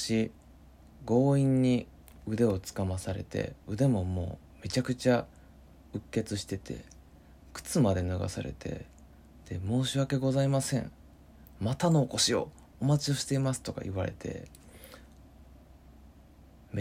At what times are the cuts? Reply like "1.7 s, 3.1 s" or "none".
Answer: none